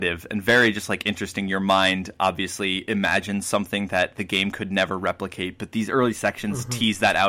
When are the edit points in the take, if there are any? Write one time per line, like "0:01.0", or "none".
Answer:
none